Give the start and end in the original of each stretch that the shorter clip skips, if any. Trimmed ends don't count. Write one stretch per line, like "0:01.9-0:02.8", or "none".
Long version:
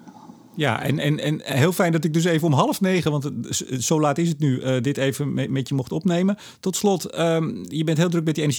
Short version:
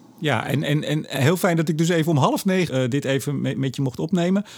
0:03.0-0:04.6